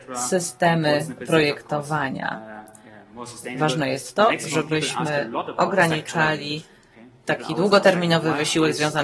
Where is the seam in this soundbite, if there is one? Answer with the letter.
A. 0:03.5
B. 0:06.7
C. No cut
C